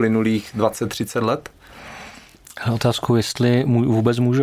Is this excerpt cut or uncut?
uncut